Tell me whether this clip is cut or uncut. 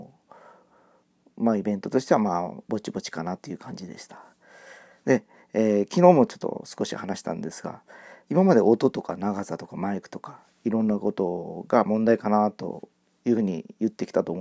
cut